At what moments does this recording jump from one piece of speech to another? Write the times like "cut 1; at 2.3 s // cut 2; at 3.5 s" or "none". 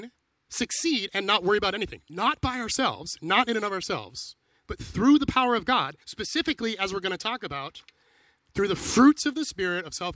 cut 1; at 4.6 s // cut 2; at 6.0 s